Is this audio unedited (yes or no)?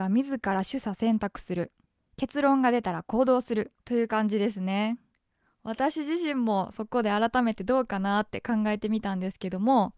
yes